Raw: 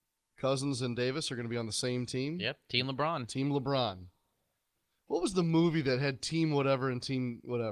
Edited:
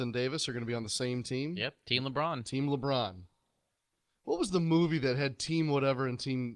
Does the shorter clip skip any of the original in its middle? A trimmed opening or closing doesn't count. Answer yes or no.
no